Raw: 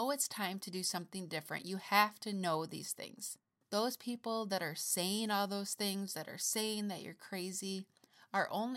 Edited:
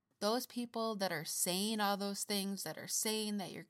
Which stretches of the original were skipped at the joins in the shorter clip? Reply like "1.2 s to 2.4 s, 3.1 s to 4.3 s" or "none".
none